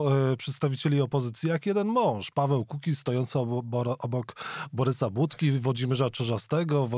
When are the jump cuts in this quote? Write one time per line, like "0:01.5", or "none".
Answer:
none